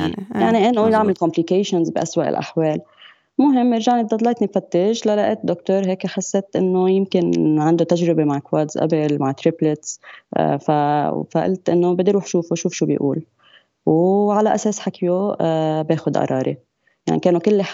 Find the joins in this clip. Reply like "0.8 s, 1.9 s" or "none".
none

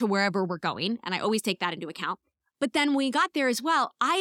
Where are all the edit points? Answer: none

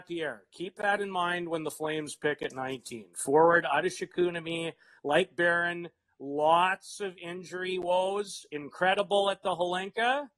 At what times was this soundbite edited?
none

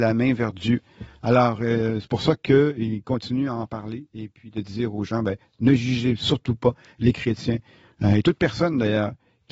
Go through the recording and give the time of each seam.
none

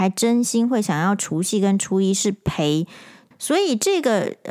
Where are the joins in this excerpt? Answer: 3.3 s

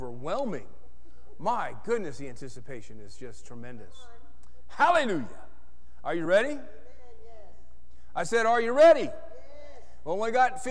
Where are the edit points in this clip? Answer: none

